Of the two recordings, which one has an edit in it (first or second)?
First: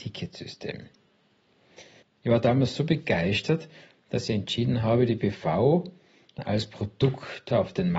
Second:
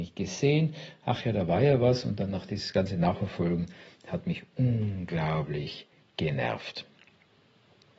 first